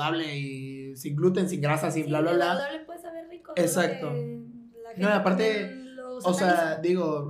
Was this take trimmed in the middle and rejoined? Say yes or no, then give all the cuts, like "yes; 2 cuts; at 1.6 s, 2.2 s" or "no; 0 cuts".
no; 0 cuts